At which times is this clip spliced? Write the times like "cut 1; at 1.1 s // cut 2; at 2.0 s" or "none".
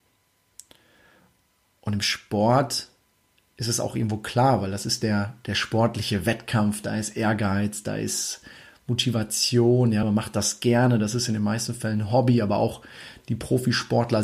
none